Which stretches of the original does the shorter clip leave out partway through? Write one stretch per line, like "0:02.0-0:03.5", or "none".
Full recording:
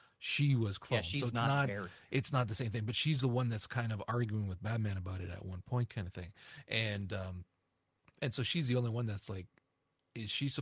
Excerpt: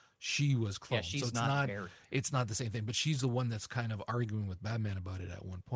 none